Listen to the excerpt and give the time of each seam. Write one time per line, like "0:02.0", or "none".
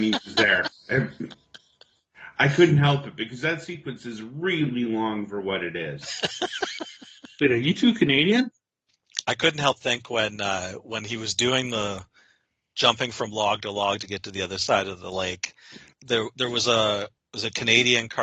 0:09.2
0:15.9